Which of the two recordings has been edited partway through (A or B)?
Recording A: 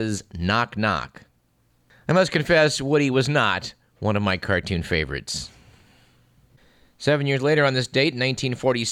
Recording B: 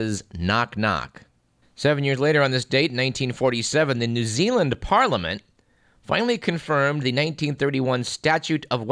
B